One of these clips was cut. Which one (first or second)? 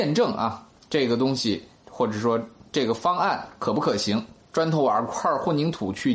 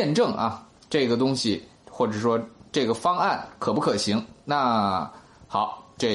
first